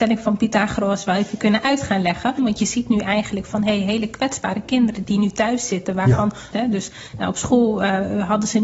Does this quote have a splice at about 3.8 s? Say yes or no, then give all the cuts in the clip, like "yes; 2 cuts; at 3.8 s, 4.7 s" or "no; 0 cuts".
no; 2 cuts; at 2.4 s, 6.5 s